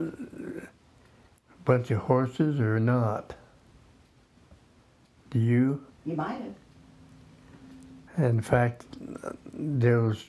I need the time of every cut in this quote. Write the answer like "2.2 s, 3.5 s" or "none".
5.9 s, 8.1 s